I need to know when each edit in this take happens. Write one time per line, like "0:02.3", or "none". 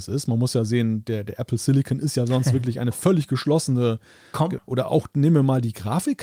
0:04.6